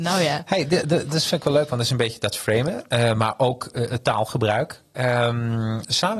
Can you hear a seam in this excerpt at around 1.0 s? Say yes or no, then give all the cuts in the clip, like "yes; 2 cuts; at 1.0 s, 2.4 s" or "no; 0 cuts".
no; 0 cuts